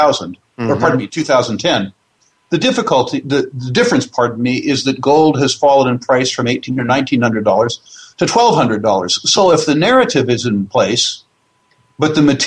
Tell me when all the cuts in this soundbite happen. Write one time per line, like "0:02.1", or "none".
none